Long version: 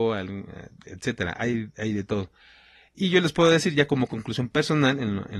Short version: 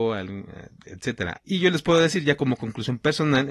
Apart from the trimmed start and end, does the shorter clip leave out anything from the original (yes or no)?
yes